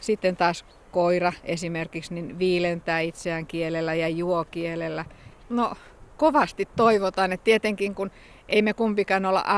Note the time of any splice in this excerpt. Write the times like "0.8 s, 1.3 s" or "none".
5.4 s